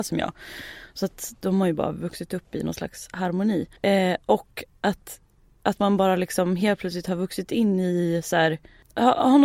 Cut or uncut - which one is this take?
cut